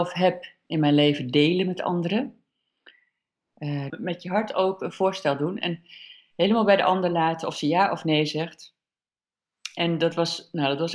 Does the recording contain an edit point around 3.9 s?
yes; 1 cut; at 3.9 s

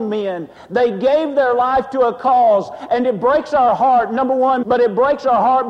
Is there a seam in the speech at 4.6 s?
yes; 1 cut; at 4.6 s

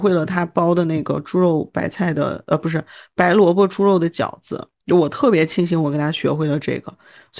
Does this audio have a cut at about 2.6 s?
no; 1 cut; at 4.7 s

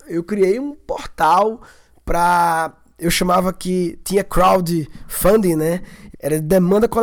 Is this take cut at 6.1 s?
yes; 1 cut; at 6.1 s

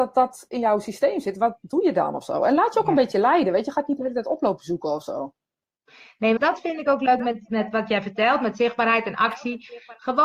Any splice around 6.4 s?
yes; 2 cuts; at 6.4 s, 7.5 s

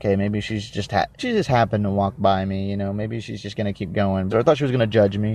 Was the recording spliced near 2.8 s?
no; 2 cuts; at 1.2 s, 4.3 s

